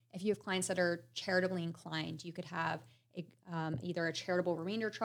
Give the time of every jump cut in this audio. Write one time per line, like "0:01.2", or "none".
none